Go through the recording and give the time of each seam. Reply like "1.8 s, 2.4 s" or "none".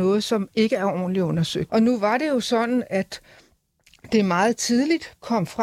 1.7 s

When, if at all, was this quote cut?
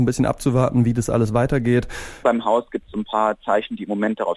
2.2 s

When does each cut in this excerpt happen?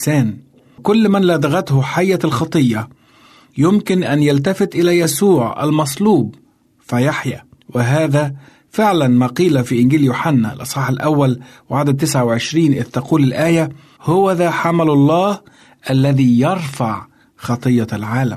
none

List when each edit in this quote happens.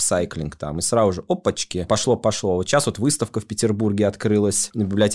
none

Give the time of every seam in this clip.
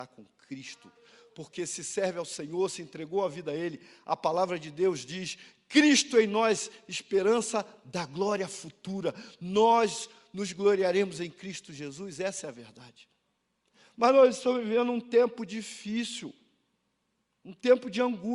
none

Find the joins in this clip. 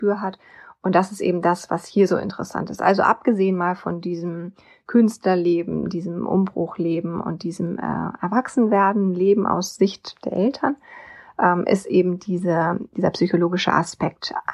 none

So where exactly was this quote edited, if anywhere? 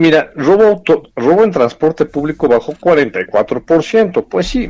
none

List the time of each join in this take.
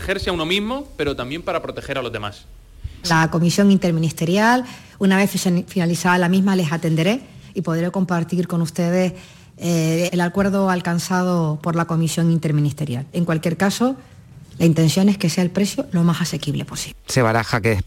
3.0 s, 10.1 s

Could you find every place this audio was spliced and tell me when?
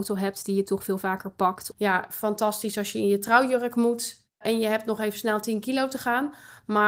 1.7 s

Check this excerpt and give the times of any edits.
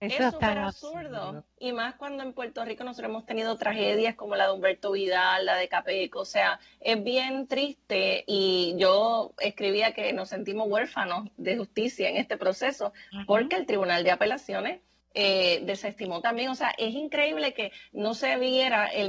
1.5 s

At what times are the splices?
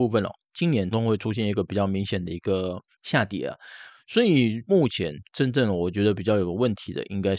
0.9 s, 4.7 s

